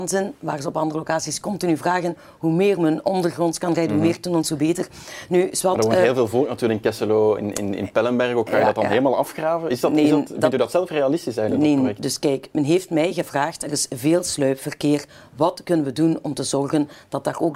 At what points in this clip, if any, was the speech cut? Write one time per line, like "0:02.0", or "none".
none